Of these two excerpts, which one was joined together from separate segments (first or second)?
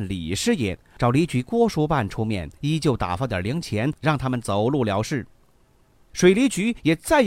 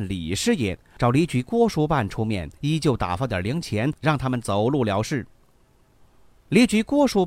first